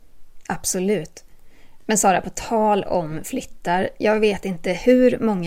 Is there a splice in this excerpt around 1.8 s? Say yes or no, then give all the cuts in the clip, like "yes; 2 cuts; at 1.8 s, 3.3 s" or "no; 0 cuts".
no; 0 cuts